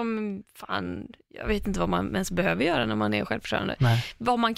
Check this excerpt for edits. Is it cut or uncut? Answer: uncut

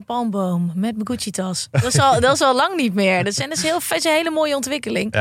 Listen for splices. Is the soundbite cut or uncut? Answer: uncut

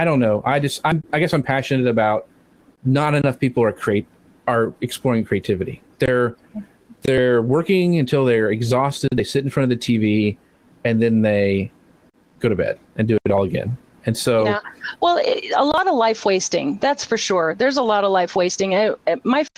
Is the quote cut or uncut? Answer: uncut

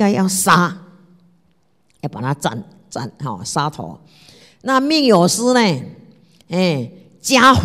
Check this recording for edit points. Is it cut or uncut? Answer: uncut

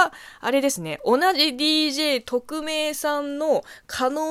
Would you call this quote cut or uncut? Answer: uncut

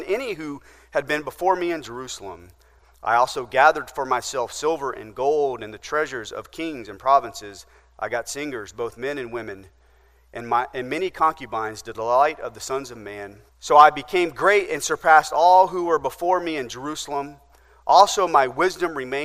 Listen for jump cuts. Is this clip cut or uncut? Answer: cut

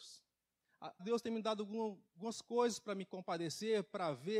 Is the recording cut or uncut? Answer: cut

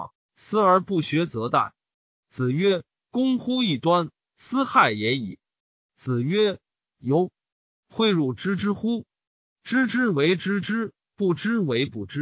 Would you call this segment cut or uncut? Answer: uncut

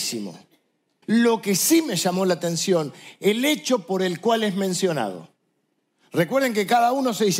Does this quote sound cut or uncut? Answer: cut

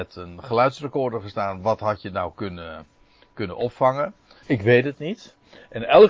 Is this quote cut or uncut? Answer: cut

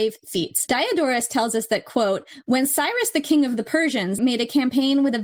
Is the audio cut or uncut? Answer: cut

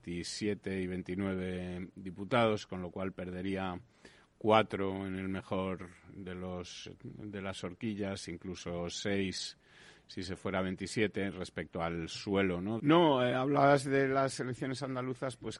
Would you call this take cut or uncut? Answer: cut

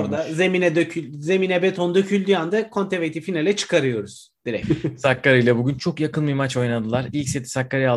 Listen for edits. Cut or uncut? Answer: cut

